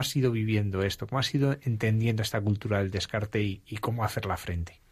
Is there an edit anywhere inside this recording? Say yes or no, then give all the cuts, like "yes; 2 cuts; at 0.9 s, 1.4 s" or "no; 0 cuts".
no; 0 cuts